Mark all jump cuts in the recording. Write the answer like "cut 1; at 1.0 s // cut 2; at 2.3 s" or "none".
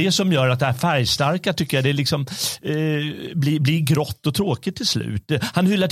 none